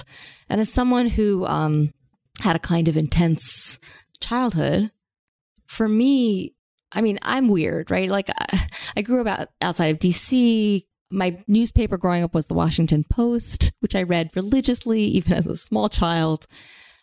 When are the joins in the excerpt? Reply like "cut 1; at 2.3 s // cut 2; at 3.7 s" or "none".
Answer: none